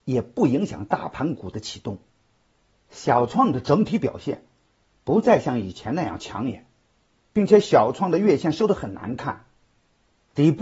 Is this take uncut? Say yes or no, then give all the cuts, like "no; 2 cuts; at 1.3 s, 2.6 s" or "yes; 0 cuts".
yes; 0 cuts